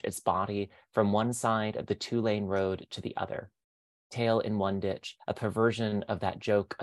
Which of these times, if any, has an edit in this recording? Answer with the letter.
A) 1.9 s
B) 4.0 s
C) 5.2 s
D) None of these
C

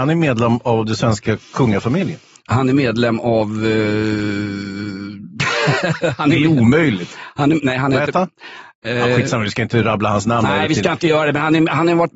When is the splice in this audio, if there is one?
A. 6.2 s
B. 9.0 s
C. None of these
C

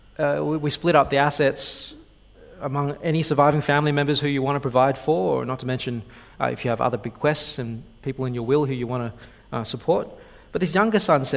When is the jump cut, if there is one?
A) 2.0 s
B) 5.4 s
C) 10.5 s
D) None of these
D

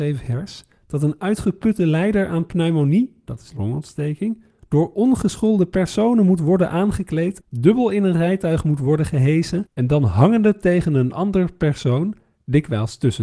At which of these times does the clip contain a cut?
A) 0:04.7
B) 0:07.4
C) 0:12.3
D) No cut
B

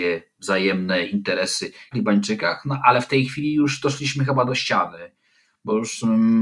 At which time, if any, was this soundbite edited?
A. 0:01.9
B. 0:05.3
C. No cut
A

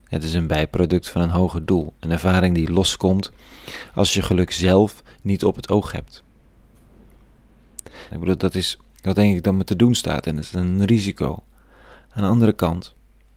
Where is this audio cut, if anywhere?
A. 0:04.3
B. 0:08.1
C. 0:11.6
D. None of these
B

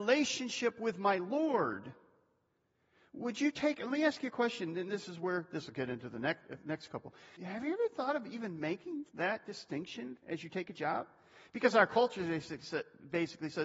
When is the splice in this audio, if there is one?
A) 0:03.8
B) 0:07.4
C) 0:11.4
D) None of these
B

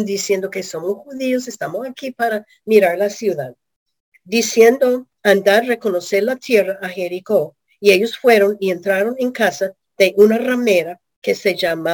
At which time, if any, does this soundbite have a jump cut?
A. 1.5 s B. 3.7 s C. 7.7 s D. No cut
D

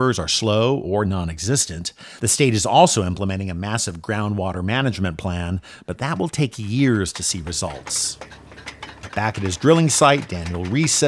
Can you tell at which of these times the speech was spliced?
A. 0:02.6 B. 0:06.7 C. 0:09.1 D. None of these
C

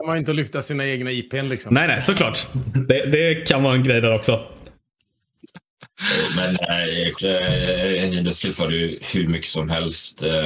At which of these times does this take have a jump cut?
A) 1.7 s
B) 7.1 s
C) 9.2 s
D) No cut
B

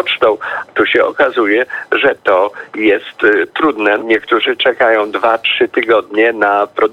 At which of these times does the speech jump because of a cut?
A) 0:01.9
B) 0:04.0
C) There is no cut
B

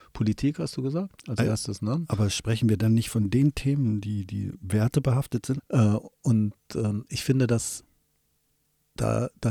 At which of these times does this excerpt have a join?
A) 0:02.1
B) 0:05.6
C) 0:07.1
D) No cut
B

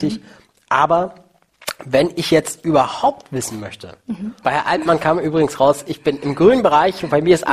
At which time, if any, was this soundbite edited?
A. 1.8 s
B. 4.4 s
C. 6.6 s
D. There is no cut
B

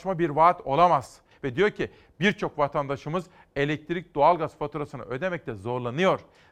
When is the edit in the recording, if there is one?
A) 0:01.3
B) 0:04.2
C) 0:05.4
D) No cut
A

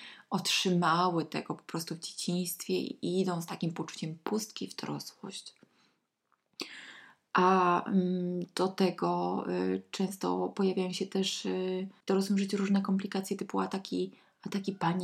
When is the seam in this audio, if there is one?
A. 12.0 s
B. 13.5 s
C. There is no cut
A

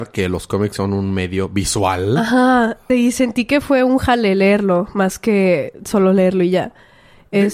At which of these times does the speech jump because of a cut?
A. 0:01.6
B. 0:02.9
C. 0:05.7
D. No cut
B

